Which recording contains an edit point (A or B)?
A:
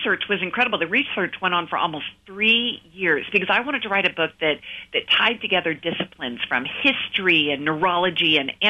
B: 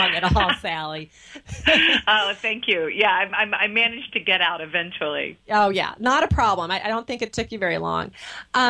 B